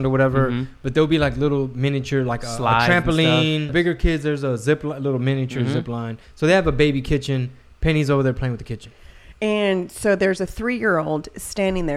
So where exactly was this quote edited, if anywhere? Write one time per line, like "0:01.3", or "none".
0:03.7